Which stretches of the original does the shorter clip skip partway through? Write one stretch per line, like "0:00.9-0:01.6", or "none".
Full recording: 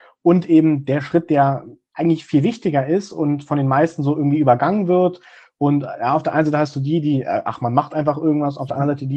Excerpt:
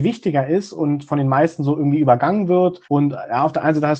0:05.2-0:05.5